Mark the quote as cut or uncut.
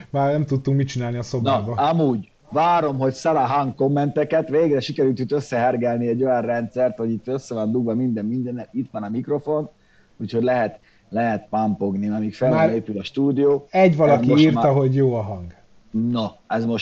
uncut